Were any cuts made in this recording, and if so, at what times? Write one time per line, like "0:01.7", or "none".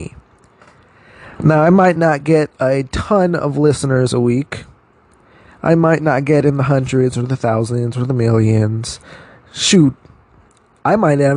none